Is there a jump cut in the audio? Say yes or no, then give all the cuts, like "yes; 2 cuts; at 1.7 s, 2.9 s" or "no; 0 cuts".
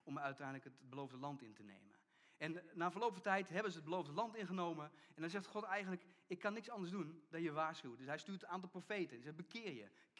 yes; 1 cut; at 5.1 s